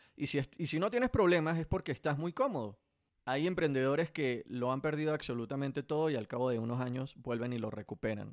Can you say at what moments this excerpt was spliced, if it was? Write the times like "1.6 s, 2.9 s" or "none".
3.1 s